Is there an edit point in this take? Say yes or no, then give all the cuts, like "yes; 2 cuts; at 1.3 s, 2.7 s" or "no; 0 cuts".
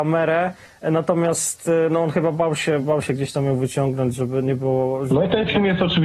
no; 0 cuts